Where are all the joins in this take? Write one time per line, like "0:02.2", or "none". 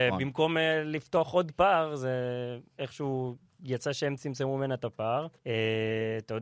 0:05.4